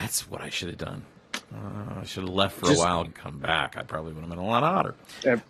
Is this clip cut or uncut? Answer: cut